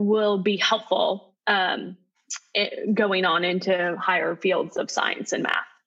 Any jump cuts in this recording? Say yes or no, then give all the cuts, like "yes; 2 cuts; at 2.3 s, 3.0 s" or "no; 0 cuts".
no; 0 cuts